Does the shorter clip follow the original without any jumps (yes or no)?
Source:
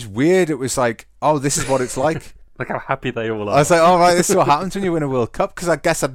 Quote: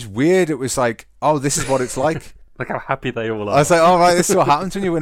yes